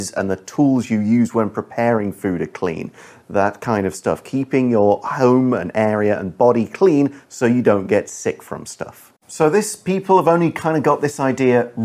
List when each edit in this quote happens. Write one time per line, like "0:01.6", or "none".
0:09.2